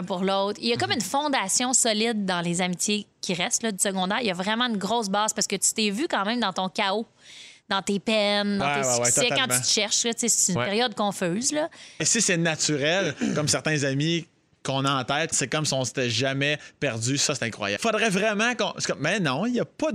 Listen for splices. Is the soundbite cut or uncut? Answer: cut